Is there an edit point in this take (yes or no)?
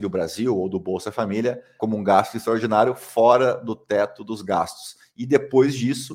yes